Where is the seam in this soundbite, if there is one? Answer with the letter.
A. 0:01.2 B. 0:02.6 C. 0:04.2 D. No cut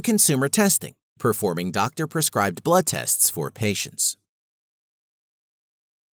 A